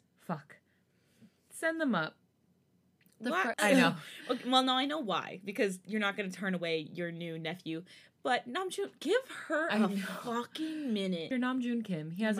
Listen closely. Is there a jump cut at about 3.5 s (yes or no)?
yes